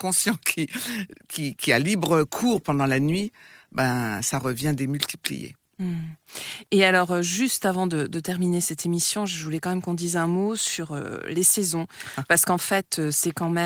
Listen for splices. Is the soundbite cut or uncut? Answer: uncut